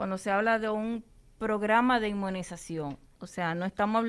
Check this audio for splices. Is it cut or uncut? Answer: cut